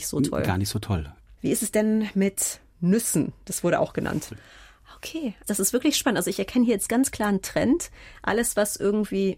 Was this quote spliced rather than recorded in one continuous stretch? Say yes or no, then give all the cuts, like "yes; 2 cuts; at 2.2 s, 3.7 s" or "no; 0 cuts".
yes; 1 cut; at 4.3 s